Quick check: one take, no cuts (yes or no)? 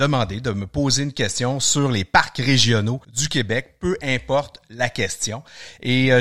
no